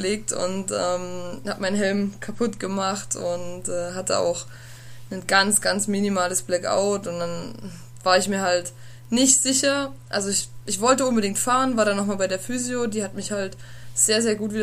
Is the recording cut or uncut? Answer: uncut